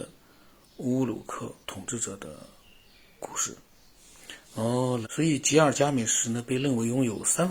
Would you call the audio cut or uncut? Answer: cut